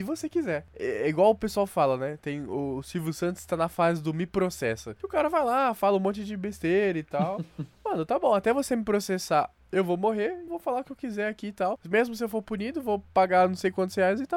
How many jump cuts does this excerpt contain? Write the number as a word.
one